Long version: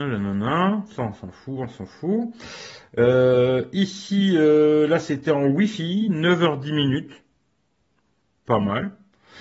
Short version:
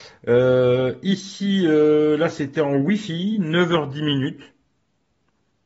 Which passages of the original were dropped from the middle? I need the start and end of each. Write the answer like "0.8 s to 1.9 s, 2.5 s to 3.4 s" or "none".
none